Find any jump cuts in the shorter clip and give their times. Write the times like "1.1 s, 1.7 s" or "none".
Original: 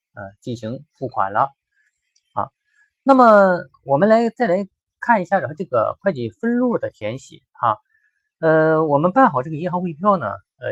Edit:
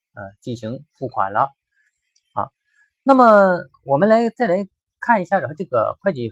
none